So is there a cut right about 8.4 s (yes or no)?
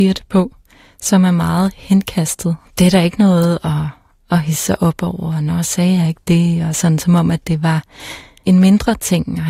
yes